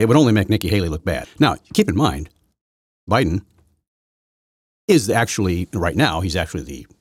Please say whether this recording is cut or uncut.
cut